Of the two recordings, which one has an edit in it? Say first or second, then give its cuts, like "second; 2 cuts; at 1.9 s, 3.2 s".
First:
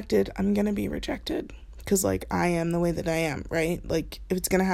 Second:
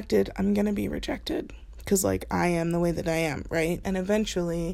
second; 1 cut; at 3.8 s